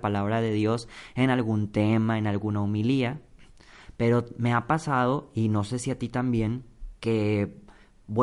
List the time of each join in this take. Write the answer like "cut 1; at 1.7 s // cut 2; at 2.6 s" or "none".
cut 1; at 7.0 s